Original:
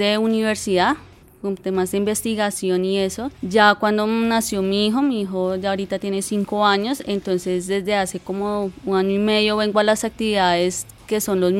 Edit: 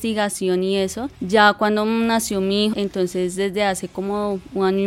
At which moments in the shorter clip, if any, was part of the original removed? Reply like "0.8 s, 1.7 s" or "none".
2.7 s